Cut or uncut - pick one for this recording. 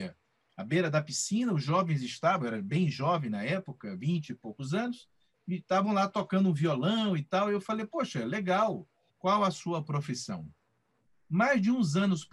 cut